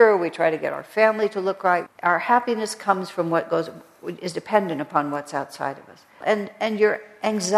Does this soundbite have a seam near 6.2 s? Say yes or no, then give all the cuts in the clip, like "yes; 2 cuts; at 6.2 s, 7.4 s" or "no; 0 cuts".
yes; 2 cuts; at 1.9 s, 6.2 s